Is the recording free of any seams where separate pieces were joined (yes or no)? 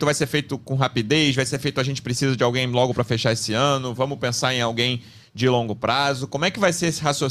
yes